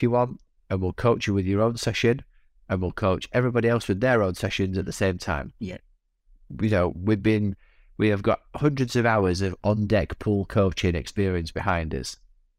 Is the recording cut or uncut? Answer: uncut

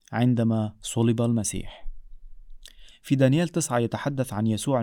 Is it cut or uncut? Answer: cut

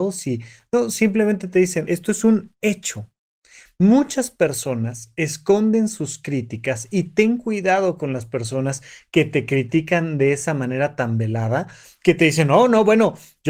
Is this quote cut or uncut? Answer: uncut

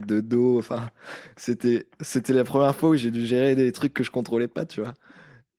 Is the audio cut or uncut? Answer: uncut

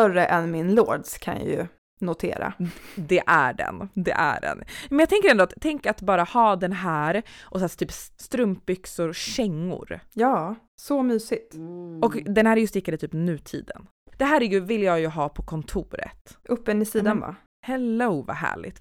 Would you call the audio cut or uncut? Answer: cut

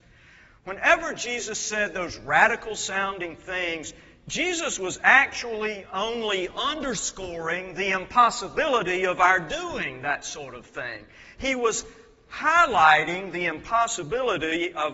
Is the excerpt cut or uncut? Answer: uncut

